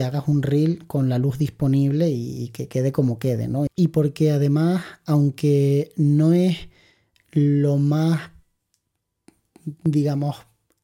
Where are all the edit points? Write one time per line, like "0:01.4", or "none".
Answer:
0:03.7